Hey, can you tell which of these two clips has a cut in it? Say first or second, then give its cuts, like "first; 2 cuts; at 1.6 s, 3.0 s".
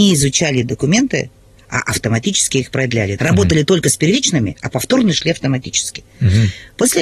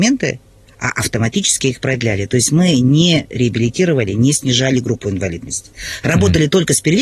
first; 1 cut; at 3.2 s